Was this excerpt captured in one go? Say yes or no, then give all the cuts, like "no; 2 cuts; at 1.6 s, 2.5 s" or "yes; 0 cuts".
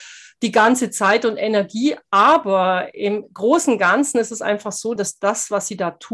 no; 1 cut; at 5.0 s